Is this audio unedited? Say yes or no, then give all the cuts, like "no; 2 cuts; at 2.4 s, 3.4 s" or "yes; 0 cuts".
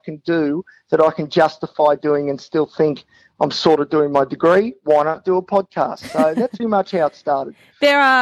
no; 1 cut; at 6.6 s